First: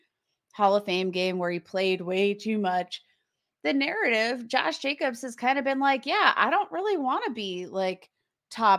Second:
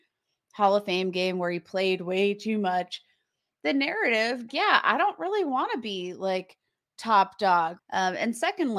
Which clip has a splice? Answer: second; 2 cuts; at 4.5 s, 7.8 s

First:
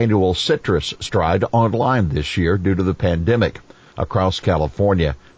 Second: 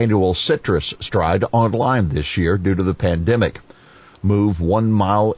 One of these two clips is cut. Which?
first; 1 cut; at 3.9 s

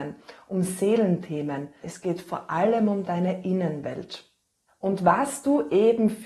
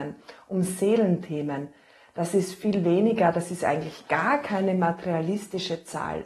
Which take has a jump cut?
first; 1 cut; at 1.8 s

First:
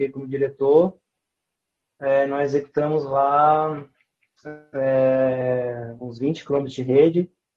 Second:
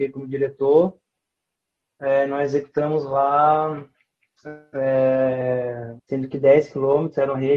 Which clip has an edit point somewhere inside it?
second; 1 cut; at 6.0 s

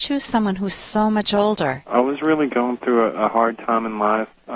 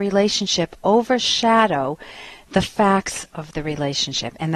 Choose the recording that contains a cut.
first; 1 cut; at 1.8 s

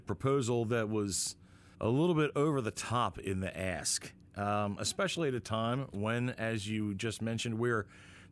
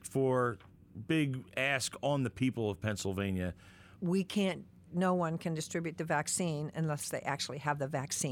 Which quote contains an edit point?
second; 1 cut; at 4.0 s

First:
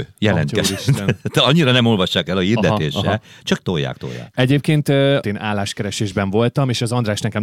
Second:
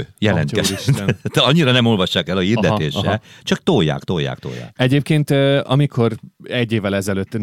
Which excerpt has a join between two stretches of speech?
first; 2 cuts; at 3.6 s, 5.2 s

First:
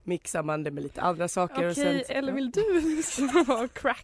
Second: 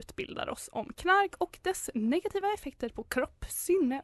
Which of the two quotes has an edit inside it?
first; 1 cut; at 2.1 s

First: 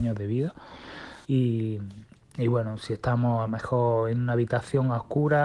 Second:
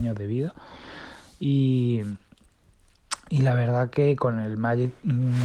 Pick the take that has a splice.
first; 1 cut; at 1.2 s

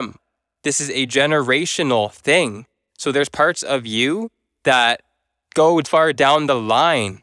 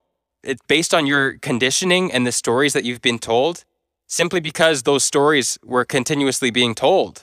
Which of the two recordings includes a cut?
first; 1 cut; at 5.8 s

